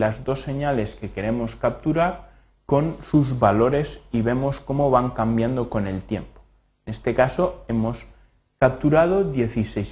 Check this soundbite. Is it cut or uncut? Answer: uncut